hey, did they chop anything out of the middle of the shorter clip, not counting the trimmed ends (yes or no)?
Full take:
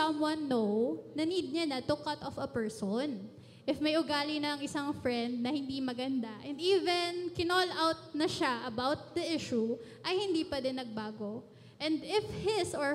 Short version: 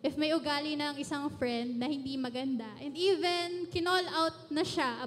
no